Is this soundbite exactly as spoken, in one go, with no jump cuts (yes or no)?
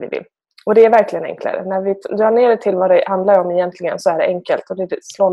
yes